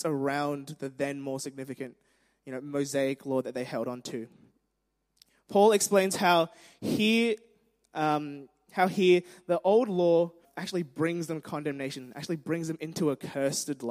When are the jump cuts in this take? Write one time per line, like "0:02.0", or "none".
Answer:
0:10.4